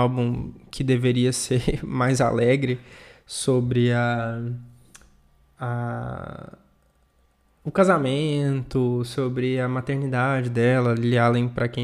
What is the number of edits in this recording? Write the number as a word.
zero